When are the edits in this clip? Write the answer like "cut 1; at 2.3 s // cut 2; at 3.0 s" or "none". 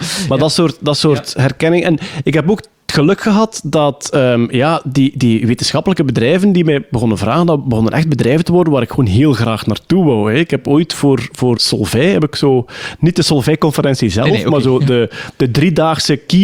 cut 1; at 11.6 s